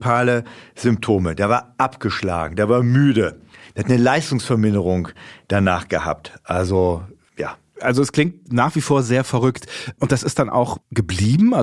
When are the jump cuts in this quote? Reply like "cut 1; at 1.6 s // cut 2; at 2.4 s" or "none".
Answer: none